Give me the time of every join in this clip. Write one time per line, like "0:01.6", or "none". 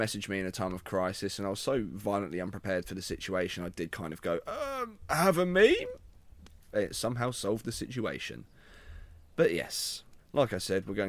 0:03.9
0:10.2